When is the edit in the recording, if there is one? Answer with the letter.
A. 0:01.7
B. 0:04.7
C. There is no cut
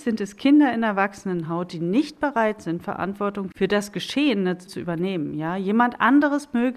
B